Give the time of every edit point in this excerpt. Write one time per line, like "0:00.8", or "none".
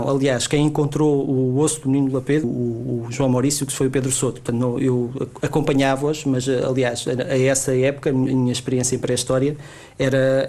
0:02.4